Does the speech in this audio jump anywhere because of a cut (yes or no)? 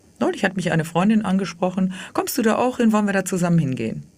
no